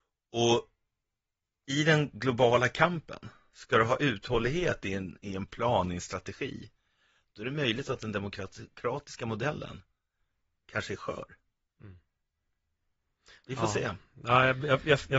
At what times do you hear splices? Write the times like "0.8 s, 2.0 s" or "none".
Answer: none